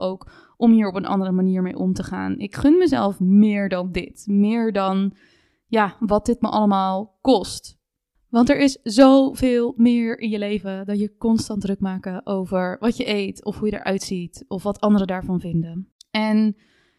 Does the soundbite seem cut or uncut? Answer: uncut